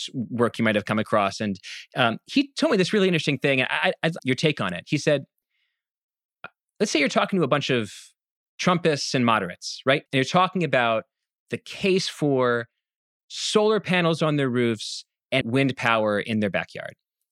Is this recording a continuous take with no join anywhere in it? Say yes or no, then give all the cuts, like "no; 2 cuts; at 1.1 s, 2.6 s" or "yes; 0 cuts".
no; 3 cuts; at 4.2 s, 10.1 s, 15.4 s